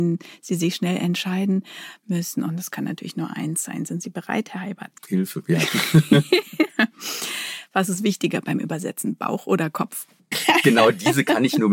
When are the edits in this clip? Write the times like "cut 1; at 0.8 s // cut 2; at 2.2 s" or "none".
cut 1; at 5.0 s // cut 2; at 10.3 s